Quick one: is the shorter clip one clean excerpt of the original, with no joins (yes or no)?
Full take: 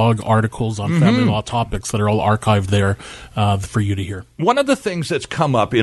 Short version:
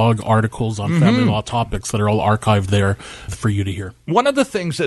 no